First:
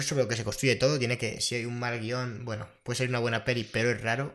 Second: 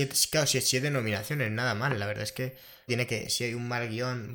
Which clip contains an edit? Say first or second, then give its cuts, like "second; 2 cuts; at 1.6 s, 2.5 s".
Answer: second; 1 cut; at 2.9 s